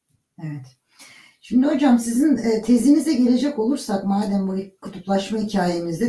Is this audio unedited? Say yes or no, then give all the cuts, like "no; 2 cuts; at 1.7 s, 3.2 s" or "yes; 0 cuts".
yes; 0 cuts